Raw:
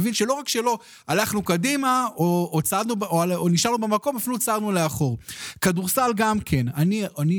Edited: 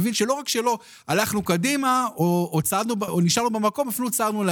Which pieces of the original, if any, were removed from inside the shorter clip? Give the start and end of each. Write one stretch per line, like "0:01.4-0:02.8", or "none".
0:03.1-0:03.4